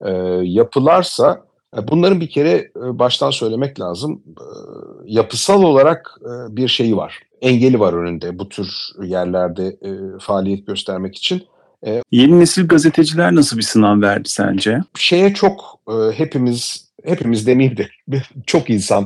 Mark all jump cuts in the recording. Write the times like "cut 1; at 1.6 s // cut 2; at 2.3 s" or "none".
cut 1; at 12.0 s // cut 2; at 14.9 s